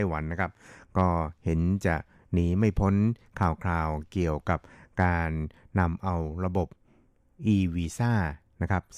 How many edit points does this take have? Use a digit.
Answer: 0